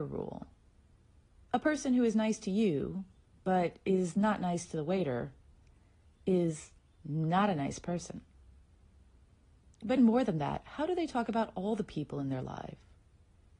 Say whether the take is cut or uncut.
cut